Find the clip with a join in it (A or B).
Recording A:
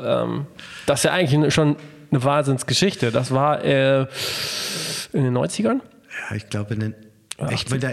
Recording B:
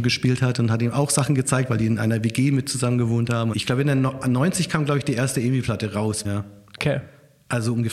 B